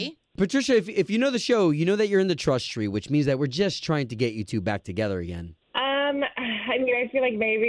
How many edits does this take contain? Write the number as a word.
one